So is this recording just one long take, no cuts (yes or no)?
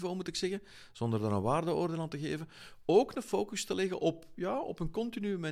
yes